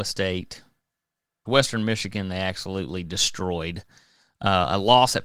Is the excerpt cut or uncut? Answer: cut